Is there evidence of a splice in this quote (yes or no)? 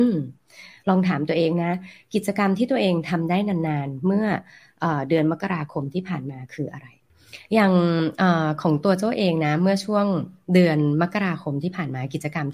no